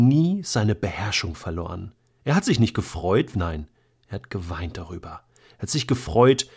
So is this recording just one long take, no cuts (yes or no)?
no